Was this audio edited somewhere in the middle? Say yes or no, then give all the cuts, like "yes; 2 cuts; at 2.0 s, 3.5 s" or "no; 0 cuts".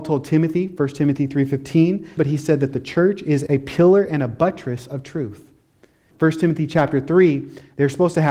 yes; 3 cuts; at 2.2 s, 3.5 s, 6.1 s